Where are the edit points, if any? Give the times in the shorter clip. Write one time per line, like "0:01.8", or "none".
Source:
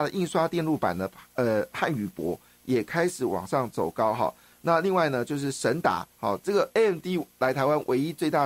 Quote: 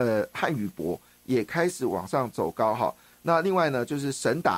none